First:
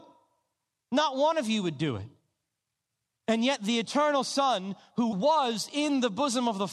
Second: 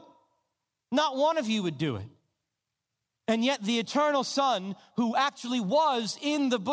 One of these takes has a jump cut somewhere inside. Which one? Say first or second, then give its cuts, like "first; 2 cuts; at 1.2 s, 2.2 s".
first; 1 cut; at 5.1 s